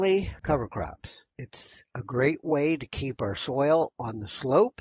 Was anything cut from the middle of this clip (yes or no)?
no